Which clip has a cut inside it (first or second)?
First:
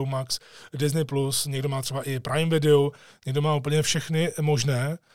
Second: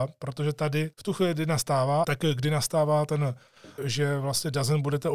second